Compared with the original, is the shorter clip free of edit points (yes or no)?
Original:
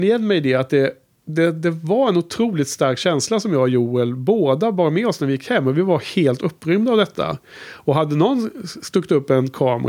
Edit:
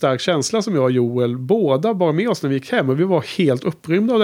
yes